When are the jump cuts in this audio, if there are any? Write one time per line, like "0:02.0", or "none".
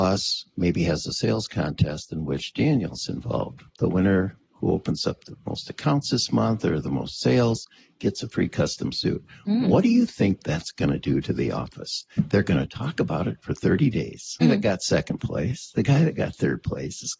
0:03.7
0:14.4